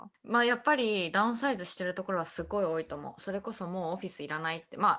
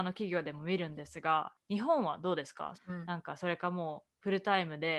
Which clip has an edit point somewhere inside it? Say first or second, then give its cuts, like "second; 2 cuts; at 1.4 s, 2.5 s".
second; 1 cut; at 2.7 s